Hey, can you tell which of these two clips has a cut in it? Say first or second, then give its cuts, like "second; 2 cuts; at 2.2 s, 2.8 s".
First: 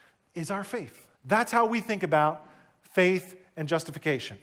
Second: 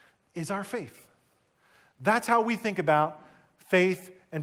first; 1 cut; at 1.1 s